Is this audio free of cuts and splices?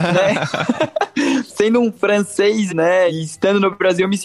no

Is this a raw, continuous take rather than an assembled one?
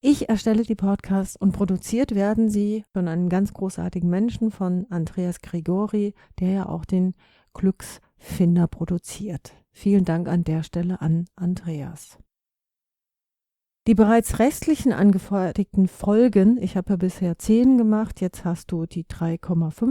no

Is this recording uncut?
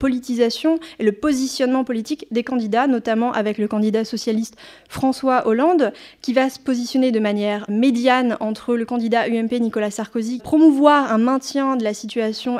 no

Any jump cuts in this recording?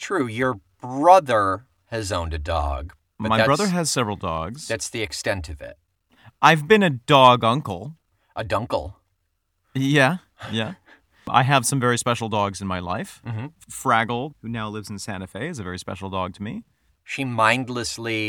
yes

